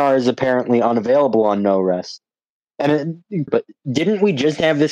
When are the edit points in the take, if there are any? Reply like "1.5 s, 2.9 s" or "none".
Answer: 3.5 s